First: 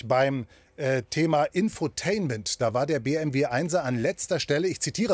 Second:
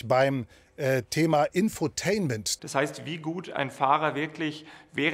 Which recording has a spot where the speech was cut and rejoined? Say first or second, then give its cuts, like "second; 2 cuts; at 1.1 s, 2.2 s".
second; 1 cut; at 2.6 s